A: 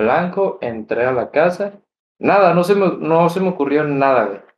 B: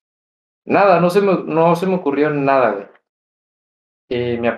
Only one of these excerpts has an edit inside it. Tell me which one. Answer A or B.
A